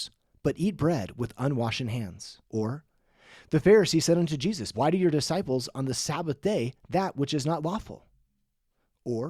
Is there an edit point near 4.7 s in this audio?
yes; 2 cuts; at 2.5 s, 4.7 s

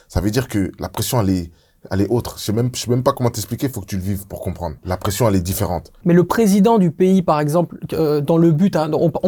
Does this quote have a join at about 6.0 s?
yes; 2 cuts; at 4.8 s, 6.0 s

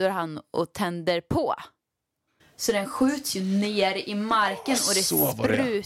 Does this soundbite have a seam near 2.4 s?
yes; 1 cut; at 2.4 s

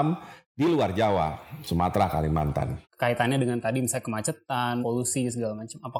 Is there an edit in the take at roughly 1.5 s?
no; 2 cuts; at 2.8 s, 4.8 s

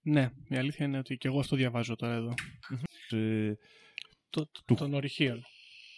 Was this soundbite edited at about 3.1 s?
yes; 1 cut; at 3.1 s

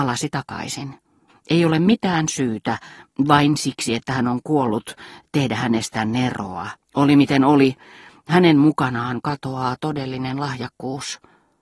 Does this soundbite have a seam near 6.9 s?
yes; 2 cuts; at 1.3 s, 6.9 s

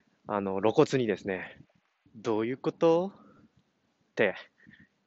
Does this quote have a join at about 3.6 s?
no; 1 cut; at 2.1 s

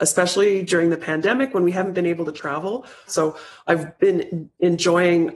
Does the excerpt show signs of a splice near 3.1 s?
yes; 1 cut; at 3.1 s

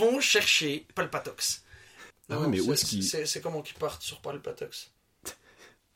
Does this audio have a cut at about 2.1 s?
yes; 1 cut; at 2.1 s

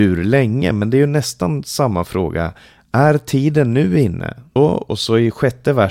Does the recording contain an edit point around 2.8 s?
no; 1 cut; at 4.6 s

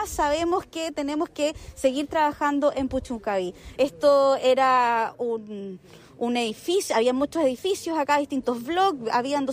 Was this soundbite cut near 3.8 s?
yes; 1 cut; at 3.8 s

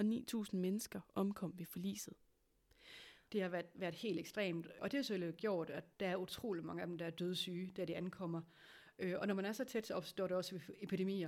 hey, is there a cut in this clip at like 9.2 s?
no; 2 cuts; at 3.3 s, 5.9 s

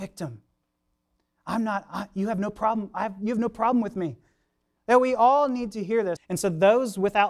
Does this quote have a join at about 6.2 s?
yes; 2 cuts; at 4.8 s, 6.2 s

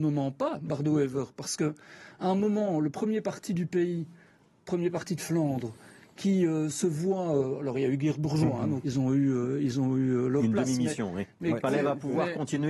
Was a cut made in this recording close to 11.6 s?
yes; 2 cuts; at 8.8 s, 11.6 s

